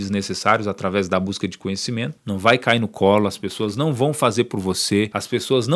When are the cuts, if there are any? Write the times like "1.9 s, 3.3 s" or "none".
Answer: 2.2 s

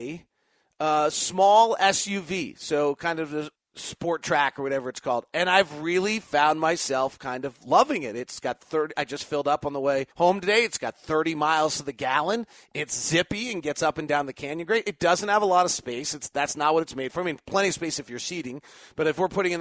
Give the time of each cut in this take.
3.6 s, 10.1 s

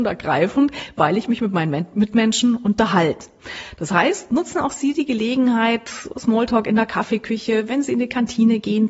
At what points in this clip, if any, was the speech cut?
none

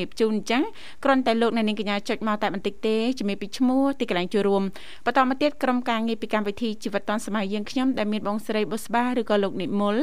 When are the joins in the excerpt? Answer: none

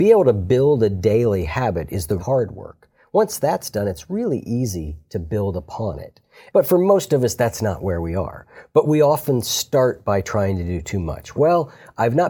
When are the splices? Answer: 2.2 s, 6.5 s, 11.4 s

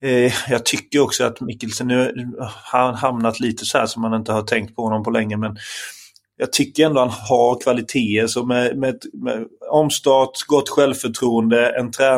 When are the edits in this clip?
none

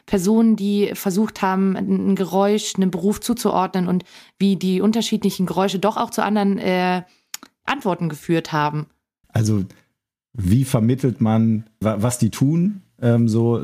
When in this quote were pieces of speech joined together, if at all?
9.2 s, 11.8 s

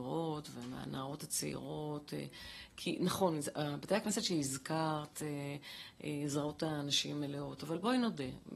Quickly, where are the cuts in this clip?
none

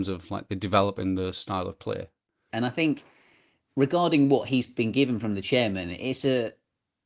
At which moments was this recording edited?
2.5 s

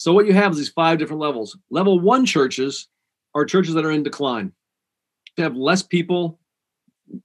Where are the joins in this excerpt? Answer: 5.4 s

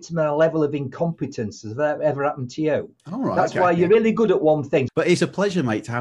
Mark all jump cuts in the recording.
3.0 s, 4.9 s

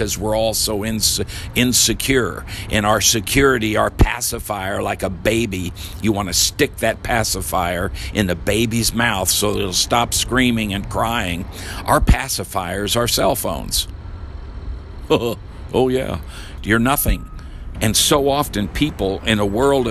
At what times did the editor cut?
16.6 s, 17.7 s

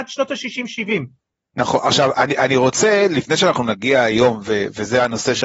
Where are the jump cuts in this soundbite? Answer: none

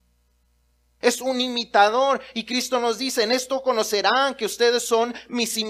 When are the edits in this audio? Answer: 1.0 s

